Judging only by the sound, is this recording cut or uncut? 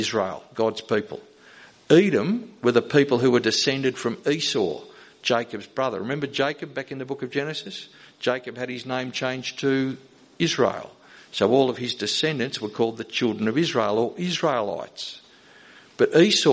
uncut